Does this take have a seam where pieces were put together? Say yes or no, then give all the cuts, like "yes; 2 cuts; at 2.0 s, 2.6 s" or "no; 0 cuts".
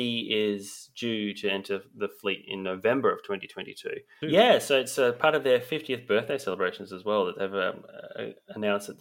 yes; 1 cut; at 4.2 s